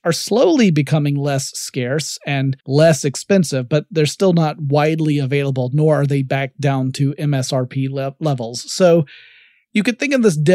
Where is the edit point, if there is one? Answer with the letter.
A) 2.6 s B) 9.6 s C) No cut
A